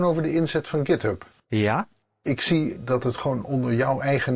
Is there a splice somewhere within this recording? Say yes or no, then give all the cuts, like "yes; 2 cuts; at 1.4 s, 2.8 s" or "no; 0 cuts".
yes; 1 cut; at 2.7 s